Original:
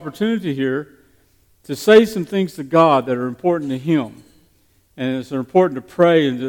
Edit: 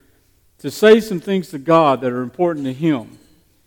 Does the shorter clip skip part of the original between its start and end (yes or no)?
no